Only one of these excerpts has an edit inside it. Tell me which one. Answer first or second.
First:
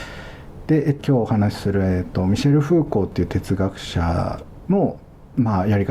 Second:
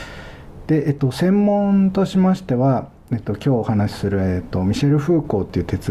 first